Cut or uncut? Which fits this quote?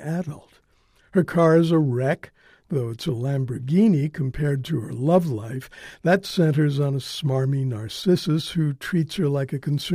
uncut